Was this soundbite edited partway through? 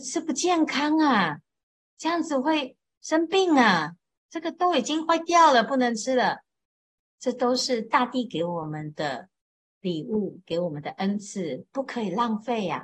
yes; 1 cut; at 7.0 s

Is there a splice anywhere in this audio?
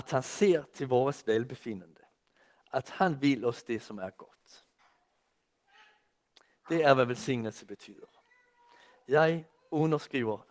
no; 0 cuts

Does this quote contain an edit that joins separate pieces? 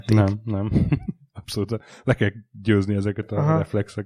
no; 0 cuts

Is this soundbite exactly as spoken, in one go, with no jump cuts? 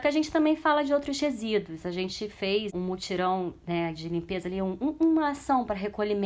yes; 0 cuts

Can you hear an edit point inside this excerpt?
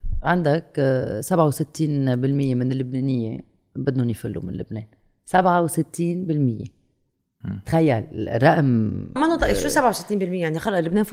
yes; 1 cut; at 9.2 s

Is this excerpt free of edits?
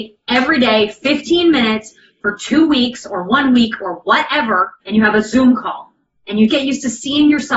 no; 2 cuts; at 4.8 s, 6.5 s

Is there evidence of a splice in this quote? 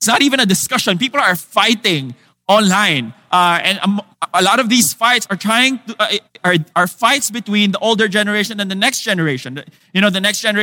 no; 0 cuts

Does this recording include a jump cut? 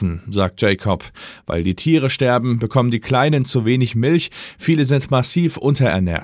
no; 0 cuts

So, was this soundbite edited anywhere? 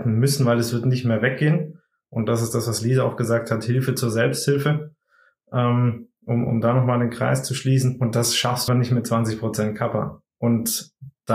yes; 2 cuts; at 8.7 s, 10.3 s

